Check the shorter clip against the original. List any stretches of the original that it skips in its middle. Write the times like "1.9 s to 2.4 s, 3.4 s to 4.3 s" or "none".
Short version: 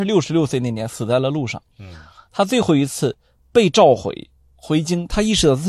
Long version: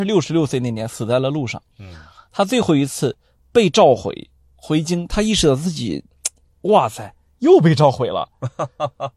none